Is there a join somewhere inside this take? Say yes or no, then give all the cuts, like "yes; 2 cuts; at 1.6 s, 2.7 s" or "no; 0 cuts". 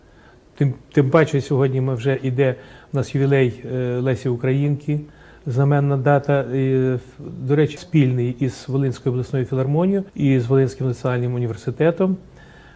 yes; 2 cuts; at 7.8 s, 10.1 s